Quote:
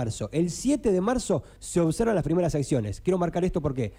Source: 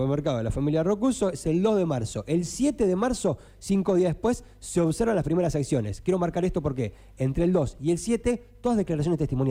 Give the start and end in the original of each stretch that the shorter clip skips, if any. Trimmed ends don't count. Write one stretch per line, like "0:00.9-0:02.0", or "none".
0:03.5-0:04.6